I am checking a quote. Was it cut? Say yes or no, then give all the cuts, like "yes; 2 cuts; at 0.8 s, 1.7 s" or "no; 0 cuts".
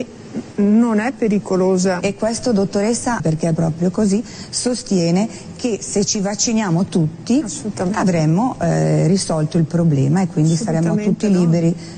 yes; 2 cuts; at 2.0 s, 3.2 s